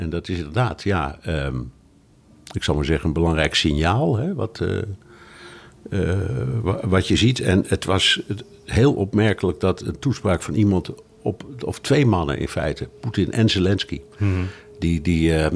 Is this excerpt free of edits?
yes; 0 cuts

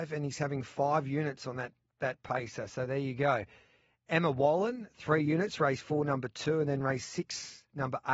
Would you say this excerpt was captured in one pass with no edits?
yes; 0 cuts

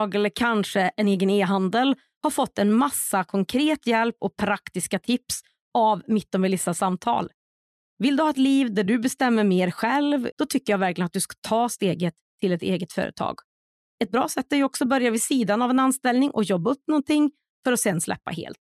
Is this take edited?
yes; 2 cuts; at 10.3 s, 13.8 s

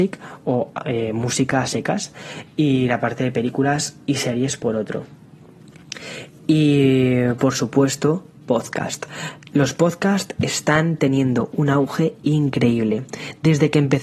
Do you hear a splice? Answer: no; 0 cuts

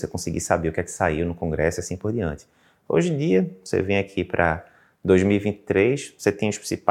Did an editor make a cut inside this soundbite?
no; 0 cuts

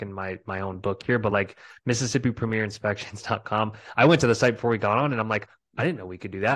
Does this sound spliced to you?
no; 0 cuts

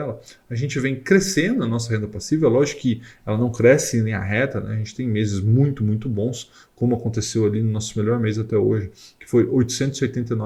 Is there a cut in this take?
no; 0 cuts

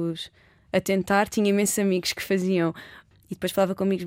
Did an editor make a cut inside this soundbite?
yes; 1 cut; at 3.1 s

